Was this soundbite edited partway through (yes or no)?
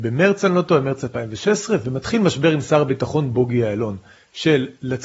yes